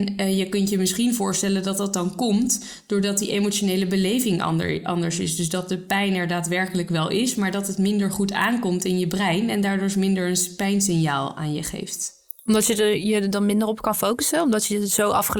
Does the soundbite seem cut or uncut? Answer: uncut